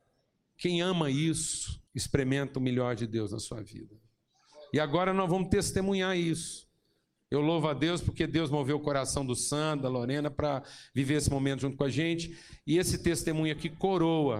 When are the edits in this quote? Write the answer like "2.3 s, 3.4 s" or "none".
1.9 s